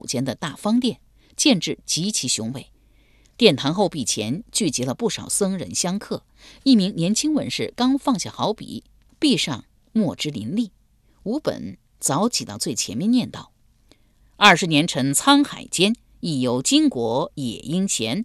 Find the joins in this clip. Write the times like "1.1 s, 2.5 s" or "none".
none